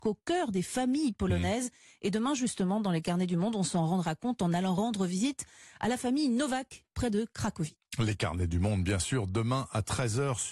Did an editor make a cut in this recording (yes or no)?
no